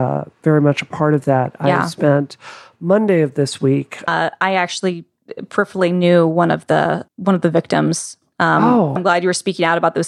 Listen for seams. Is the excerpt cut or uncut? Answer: cut